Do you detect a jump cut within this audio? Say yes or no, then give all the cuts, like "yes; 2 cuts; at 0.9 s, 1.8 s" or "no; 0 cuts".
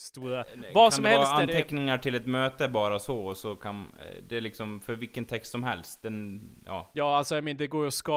no; 0 cuts